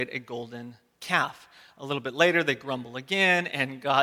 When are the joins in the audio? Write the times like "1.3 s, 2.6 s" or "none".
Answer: none